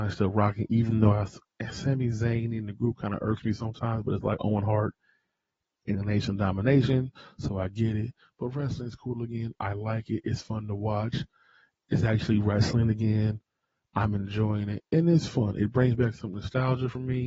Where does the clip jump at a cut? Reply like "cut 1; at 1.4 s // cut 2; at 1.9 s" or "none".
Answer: none